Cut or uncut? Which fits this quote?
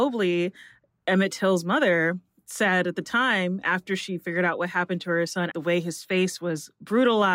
cut